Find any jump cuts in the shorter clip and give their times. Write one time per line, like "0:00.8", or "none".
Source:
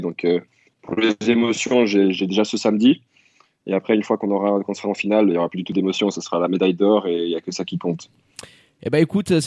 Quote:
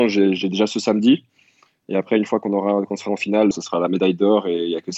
0:03.5